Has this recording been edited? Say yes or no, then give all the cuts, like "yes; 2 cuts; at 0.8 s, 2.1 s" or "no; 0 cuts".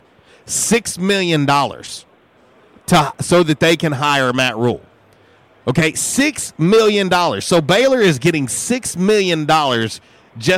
no; 0 cuts